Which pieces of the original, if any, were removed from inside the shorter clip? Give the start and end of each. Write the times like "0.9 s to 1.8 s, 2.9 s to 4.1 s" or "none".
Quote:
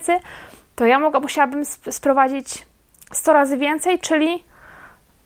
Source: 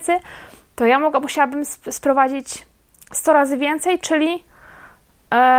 none